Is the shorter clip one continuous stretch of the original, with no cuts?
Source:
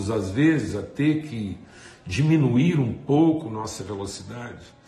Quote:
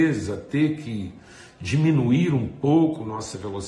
yes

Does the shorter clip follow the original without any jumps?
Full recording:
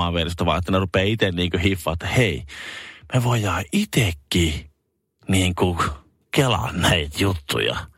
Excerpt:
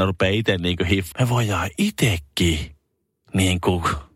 no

